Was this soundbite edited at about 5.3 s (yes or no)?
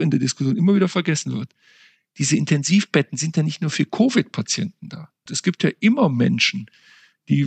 yes